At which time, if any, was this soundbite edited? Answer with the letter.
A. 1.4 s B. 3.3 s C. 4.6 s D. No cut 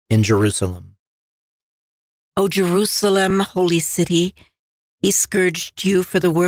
D